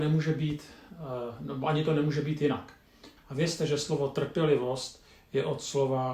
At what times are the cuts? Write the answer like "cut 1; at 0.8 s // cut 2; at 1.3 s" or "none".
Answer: cut 1; at 3.2 s